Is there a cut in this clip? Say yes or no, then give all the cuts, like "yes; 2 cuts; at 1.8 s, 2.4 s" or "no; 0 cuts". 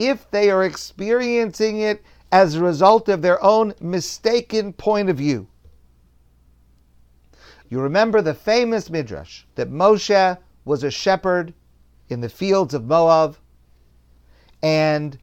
yes; 2 cuts; at 7.6 s, 9.5 s